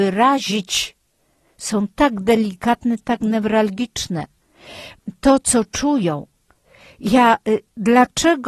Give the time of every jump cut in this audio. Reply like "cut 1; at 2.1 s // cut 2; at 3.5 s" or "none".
none